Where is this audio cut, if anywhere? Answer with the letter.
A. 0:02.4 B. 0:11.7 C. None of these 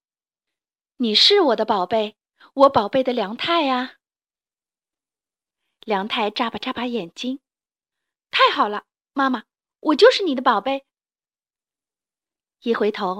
C